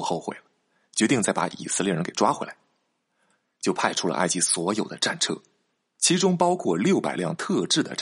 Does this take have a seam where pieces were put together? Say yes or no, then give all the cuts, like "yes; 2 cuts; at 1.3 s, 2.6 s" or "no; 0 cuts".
no; 0 cuts